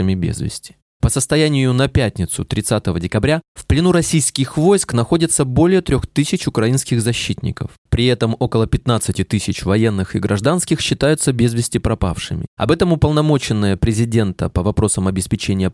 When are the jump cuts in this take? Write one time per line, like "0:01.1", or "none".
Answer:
none